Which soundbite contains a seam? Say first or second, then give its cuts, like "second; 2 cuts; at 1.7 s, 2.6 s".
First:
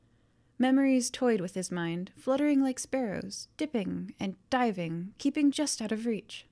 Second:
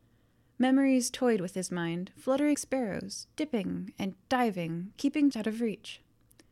second; 2 cuts; at 2.5 s, 5.3 s